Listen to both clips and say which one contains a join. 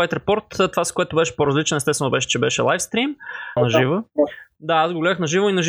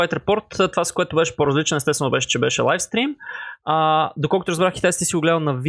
first; 1 cut; at 3.6 s

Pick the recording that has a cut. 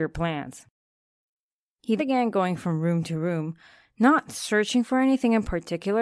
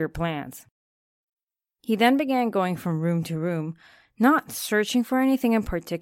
first; 1 cut; at 2.0 s

